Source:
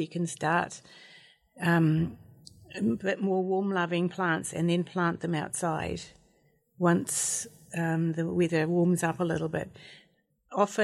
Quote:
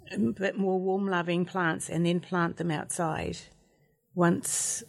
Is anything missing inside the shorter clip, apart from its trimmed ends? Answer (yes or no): no